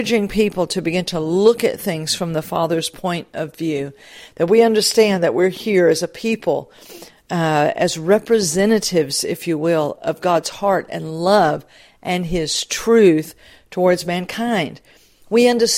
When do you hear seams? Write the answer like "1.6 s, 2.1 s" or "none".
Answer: none

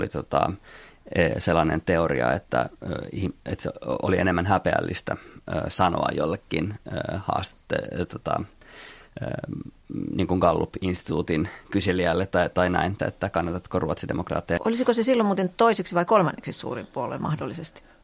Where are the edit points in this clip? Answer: 13.0 s, 14.6 s

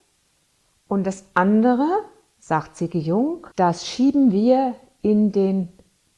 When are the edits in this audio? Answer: 3.5 s

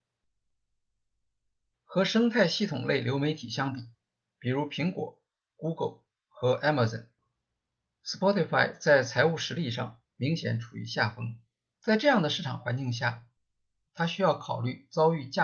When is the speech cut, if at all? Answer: 11.7 s

